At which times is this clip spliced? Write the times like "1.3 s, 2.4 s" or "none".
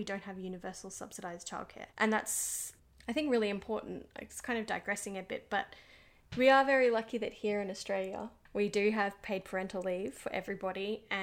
1.9 s

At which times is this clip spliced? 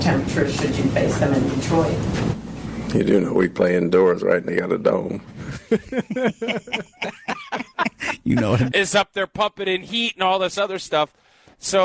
8.7 s

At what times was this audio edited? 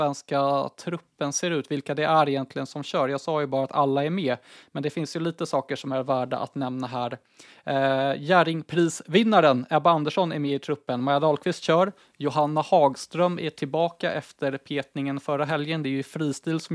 none

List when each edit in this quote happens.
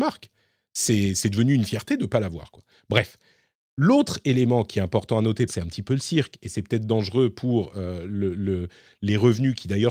5.5 s

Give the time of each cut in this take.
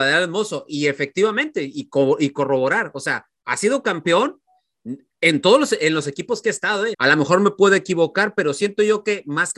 6.9 s

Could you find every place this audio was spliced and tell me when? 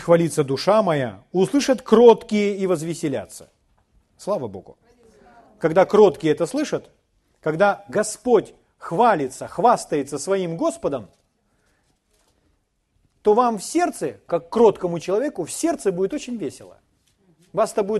14.3 s

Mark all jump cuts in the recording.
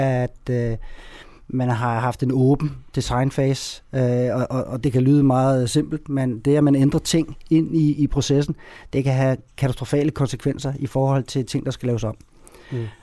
none

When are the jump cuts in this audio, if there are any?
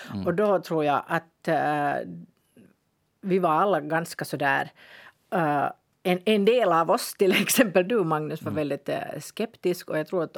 none

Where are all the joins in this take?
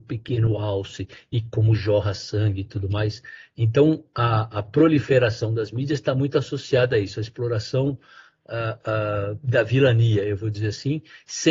4.5 s

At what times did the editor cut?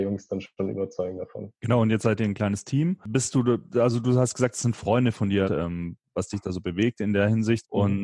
5.5 s

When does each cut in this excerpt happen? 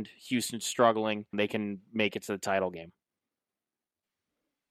1.3 s

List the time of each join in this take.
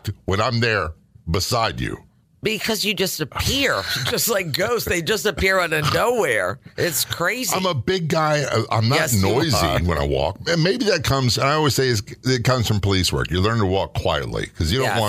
none

